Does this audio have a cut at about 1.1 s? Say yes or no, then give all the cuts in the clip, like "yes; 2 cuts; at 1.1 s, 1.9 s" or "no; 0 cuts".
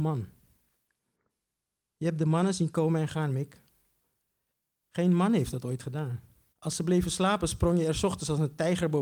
no; 2 cuts; at 4.8 s, 6.5 s